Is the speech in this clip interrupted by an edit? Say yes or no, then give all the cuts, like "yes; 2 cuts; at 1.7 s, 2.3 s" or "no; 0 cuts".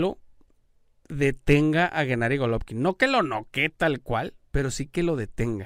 no; 0 cuts